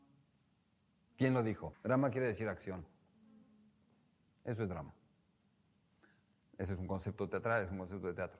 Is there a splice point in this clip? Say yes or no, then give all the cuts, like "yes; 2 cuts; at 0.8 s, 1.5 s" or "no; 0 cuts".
yes; 1 cut; at 1.7 s